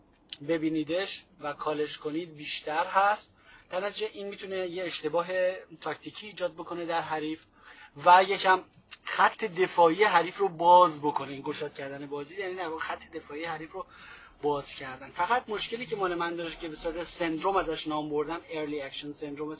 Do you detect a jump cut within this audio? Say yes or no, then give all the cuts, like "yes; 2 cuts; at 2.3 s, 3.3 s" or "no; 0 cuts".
no; 0 cuts